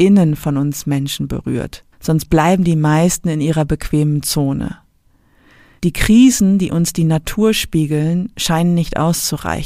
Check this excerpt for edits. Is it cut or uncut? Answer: cut